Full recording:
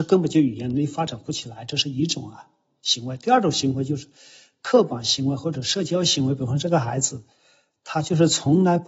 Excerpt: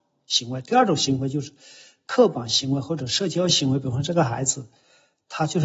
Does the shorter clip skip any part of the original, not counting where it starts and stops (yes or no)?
no